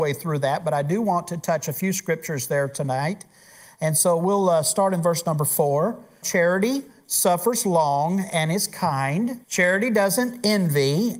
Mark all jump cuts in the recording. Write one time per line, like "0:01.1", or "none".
0:06.2
0:09.4